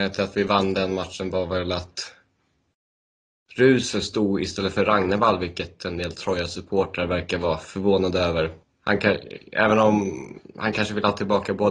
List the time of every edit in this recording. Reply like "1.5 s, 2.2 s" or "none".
8.6 s